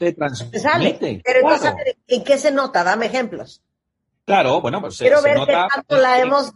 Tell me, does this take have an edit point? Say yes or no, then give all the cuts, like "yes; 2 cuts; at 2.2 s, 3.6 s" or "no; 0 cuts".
no; 0 cuts